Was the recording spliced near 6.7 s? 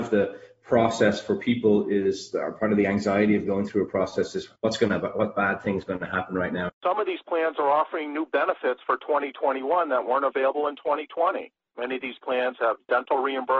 yes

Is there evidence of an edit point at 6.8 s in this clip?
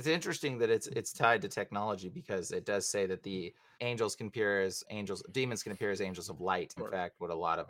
yes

